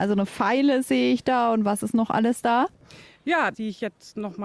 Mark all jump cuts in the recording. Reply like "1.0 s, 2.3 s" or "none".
3.5 s